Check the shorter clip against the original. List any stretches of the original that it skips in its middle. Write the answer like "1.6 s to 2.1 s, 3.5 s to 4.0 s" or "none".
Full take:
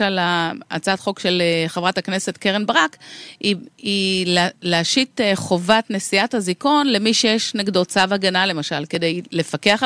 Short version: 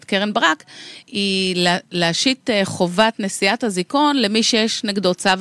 3.3 s to 3.7 s